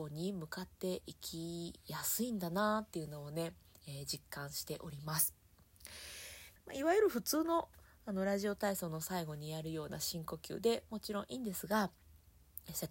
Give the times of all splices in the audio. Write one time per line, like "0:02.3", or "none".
0:06.6